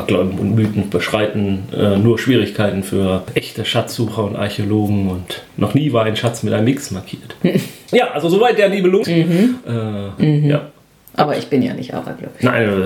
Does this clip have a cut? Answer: yes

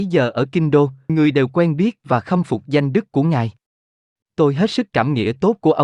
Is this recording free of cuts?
no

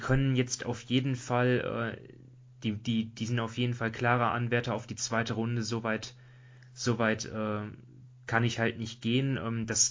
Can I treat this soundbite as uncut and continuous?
yes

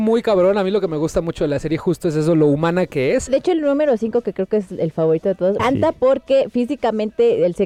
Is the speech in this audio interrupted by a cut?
yes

